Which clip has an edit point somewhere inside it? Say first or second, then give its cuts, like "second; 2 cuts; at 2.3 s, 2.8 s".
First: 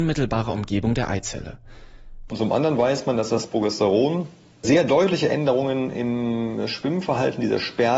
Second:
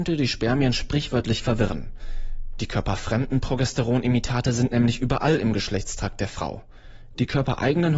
first; 1 cut; at 2.3 s